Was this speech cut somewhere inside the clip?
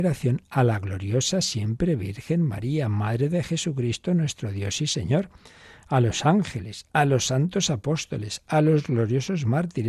no; 0 cuts

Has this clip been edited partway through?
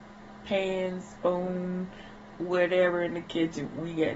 yes; 1 cut; at 2.4 s

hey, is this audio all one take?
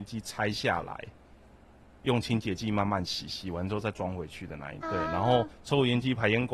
no; 1 cut; at 4.8 s

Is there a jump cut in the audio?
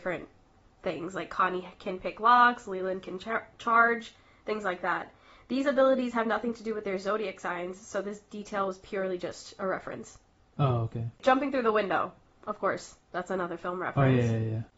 no; 0 cuts

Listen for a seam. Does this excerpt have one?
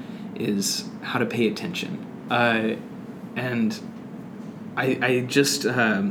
yes; 1 cut; at 2.3 s

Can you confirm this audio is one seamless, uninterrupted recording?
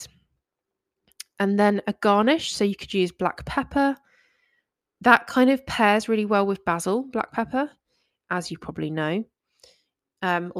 yes; 0 cuts

